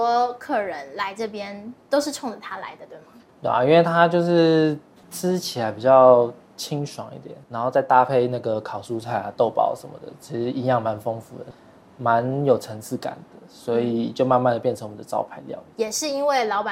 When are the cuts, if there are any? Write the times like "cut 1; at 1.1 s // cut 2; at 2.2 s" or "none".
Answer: none